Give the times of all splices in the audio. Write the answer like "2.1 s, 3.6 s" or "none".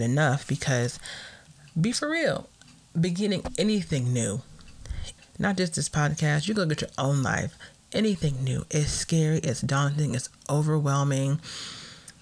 5.2 s